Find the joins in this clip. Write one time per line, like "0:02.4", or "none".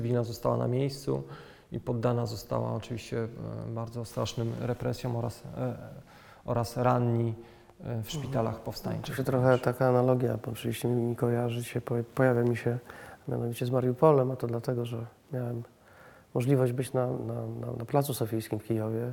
none